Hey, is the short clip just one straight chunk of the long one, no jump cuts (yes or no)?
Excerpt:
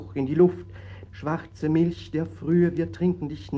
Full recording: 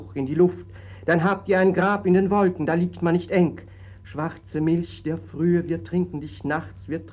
no